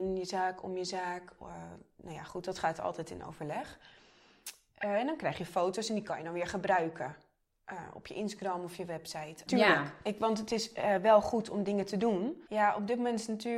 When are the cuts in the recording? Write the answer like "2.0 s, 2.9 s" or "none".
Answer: 9.5 s, 12.5 s